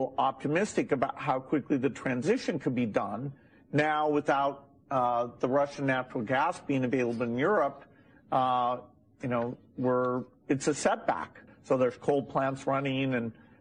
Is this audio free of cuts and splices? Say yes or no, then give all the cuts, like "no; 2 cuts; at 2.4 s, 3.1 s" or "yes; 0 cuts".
no; 1 cut; at 11.5 s